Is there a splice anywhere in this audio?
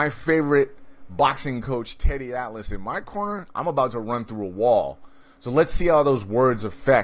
no; 0 cuts

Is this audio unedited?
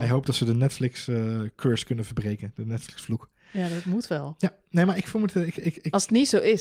yes; 0 cuts

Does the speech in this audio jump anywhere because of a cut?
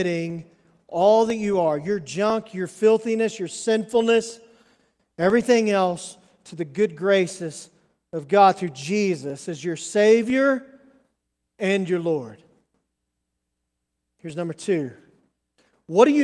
no; 0 cuts

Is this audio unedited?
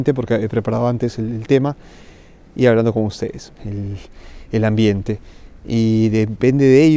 no; 1 cut; at 3.6 s

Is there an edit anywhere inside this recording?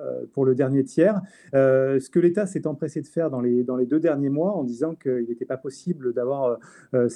no; 0 cuts

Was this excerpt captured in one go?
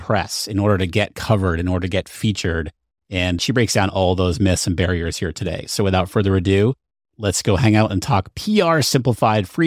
yes; 0 cuts

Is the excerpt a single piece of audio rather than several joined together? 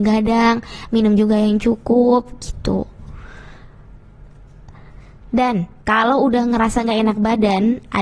yes; 0 cuts

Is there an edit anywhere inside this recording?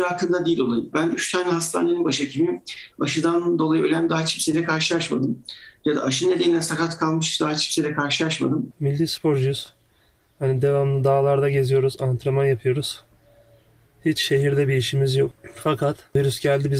yes; 1 cut; at 0.9 s

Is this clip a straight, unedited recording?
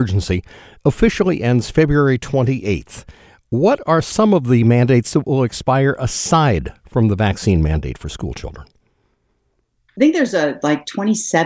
yes; 0 cuts

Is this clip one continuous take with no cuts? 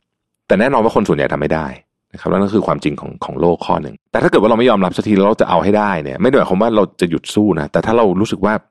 no; 1 cut; at 4.1 s

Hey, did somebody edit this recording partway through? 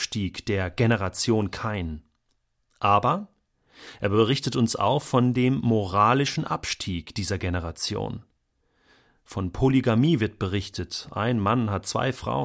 no; 0 cuts

